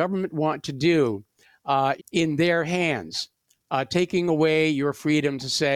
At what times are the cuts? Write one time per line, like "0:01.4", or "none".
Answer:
0:02.0